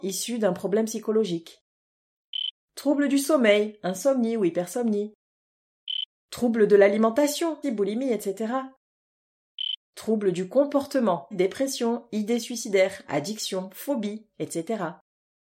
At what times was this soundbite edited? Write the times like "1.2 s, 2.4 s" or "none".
7.6 s, 11.3 s, 14.3 s